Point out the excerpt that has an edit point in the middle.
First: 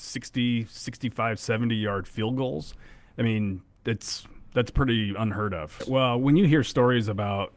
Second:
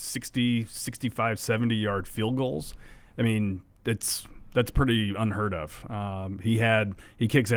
first; 1 cut; at 5.8 s

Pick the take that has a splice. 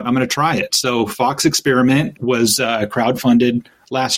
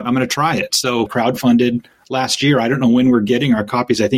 second; 1 cut; at 1.1 s

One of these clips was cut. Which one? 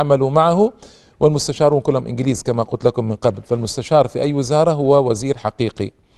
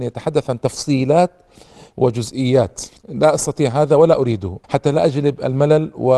second; 2 cuts; at 3.0 s, 4.6 s

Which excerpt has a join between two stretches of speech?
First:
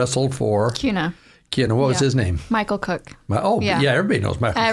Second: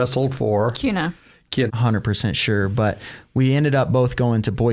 second; 1 cut; at 1.7 s

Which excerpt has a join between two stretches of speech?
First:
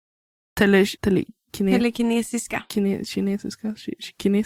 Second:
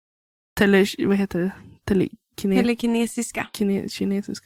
first; 1 cut; at 1.0 s

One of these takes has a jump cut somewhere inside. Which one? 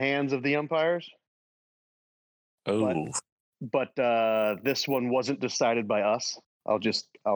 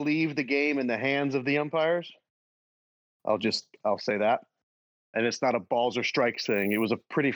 second; 2 cuts; at 3.2 s, 5.1 s

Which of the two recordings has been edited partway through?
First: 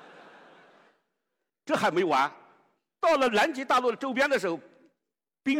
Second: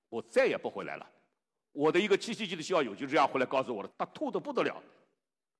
second; 1 cut; at 3.9 s

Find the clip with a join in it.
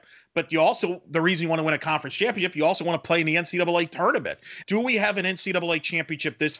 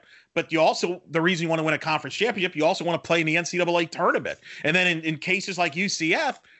first; 1 cut; at 4.6 s

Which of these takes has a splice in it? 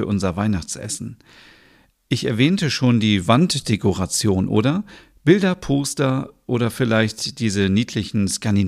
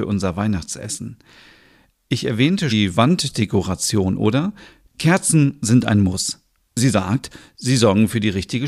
second; 2 cuts; at 2.7 s, 4.9 s

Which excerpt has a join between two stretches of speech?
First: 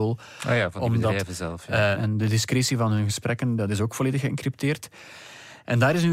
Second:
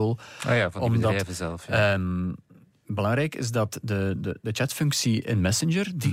first; 1 cut; at 1.9 s

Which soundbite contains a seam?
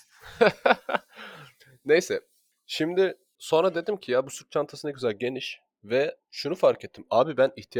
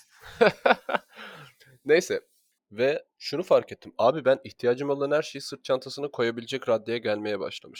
second; 1 cut; at 2.6 s

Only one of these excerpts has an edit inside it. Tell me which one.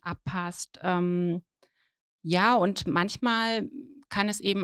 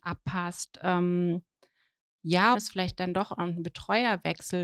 second; 1 cut; at 2.5 s

